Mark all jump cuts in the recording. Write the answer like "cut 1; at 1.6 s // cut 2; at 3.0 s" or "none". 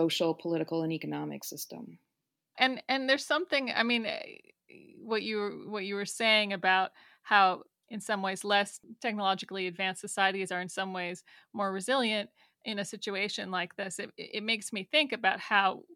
cut 1; at 2.5 s